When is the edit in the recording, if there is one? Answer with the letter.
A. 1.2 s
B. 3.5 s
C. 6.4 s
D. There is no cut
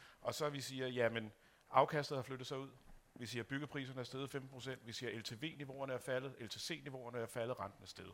D